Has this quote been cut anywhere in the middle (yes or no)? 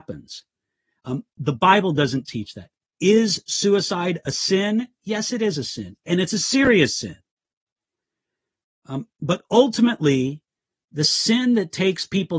yes